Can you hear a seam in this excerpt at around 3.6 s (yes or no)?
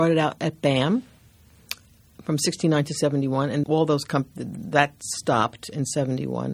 yes